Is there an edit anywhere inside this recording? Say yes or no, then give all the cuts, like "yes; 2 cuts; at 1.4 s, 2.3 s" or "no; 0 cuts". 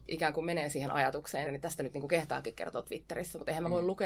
yes; 1 cut; at 1.4 s